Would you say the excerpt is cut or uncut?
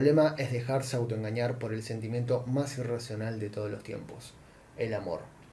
uncut